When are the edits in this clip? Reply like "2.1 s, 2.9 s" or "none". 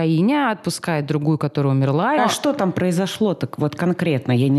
2.2 s